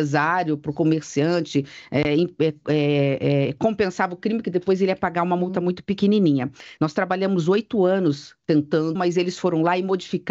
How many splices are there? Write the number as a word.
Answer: two